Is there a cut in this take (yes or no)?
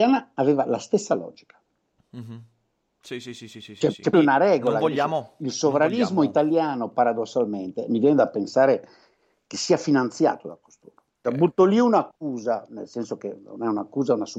yes